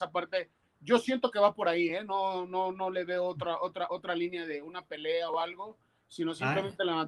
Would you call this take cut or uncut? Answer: uncut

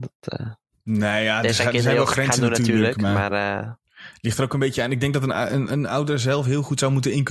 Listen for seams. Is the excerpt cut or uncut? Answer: uncut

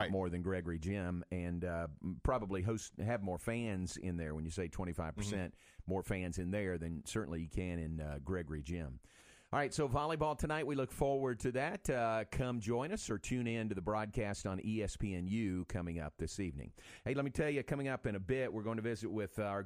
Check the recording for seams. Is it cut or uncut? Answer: uncut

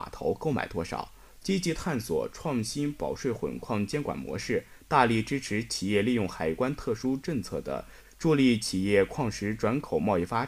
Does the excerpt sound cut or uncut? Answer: cut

